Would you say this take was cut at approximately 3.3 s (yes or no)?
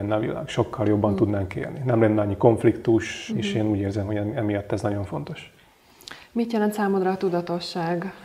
yes